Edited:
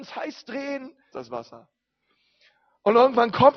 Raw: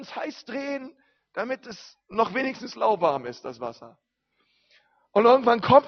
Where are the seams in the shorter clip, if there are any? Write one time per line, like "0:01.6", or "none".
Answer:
0:01.1